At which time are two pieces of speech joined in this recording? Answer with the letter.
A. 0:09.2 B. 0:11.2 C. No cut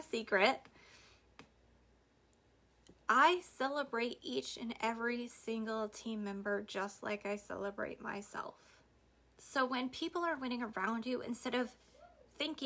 A